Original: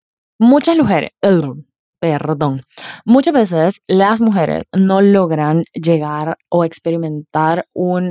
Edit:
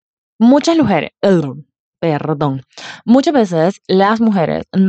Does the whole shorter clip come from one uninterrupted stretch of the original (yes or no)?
yes